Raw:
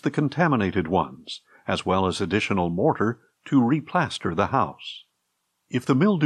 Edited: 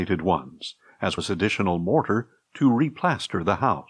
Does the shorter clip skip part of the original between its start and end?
yes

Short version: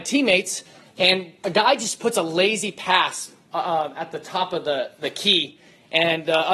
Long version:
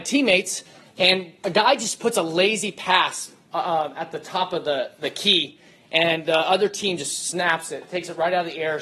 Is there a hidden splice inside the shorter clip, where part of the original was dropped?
no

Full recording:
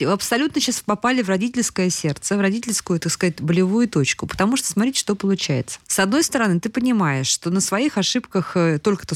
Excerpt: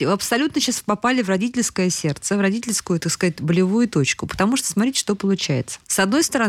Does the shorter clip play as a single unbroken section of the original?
yes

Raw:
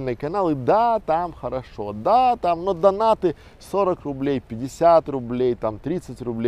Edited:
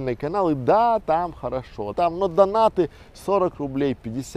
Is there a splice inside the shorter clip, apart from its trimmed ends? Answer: yes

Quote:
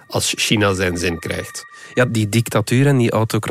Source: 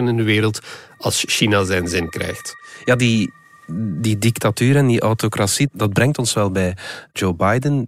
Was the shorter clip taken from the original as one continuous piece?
no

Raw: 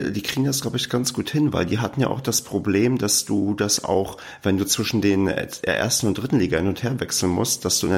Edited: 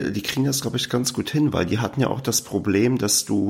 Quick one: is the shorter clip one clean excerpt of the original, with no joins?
yes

